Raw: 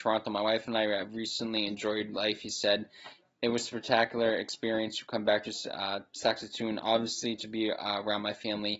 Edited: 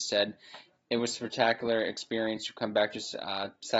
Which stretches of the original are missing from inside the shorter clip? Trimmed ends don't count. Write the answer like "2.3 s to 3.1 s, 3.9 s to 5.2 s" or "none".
none